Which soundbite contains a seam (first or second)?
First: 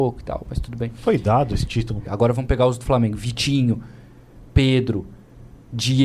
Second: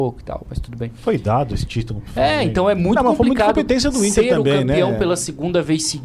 first